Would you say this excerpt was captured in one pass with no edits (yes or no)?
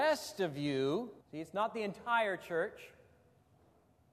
no